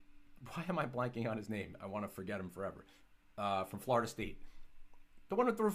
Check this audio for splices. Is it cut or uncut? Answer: uncut